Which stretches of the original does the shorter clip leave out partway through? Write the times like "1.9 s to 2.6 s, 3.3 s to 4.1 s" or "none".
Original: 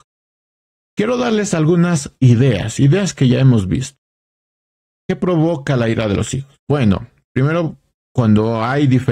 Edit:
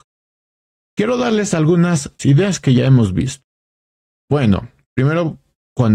2.2 s to 2.7 s, 4.8 s to 6.6 s